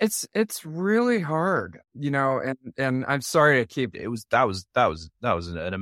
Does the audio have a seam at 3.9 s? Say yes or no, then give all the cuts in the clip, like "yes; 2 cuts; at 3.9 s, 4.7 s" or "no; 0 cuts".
yes; 2 cuts; at 1.8 s, 3.9 s